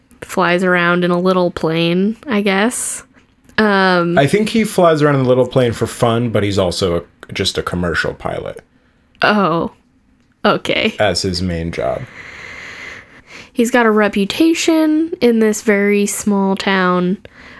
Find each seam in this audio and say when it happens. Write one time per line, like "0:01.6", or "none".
none